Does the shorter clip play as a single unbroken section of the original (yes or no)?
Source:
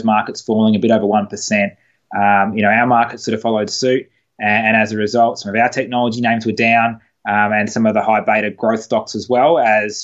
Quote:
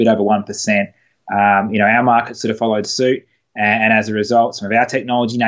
yes